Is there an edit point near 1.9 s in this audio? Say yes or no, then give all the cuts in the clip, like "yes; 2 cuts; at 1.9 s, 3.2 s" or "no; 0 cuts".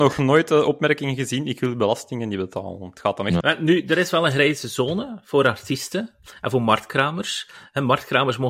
no; 1 cut; at 3.4 s